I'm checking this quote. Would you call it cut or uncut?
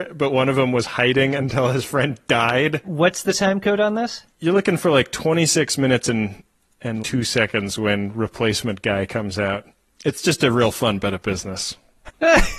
cut